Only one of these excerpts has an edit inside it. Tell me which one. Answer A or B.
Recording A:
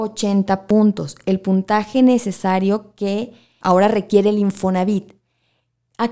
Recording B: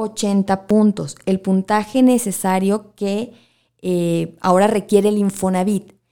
A